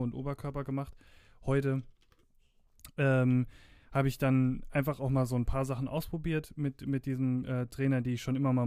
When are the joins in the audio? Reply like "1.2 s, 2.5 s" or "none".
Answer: none